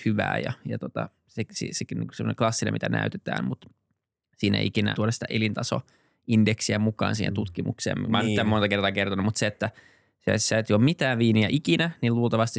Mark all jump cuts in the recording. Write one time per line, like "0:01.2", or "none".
0:04.9